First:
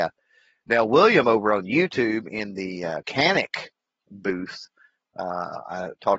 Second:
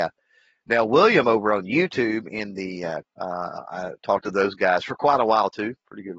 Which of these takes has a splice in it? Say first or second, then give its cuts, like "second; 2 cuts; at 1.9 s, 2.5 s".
second; 1 cut; at 3.0 s